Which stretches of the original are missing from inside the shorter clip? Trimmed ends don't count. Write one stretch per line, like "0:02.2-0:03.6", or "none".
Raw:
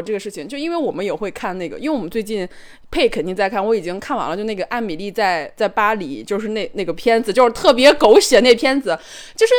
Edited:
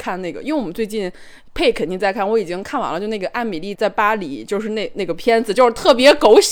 0:05.1-0:05.5